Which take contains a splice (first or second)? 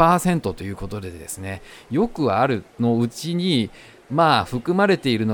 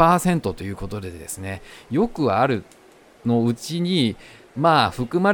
first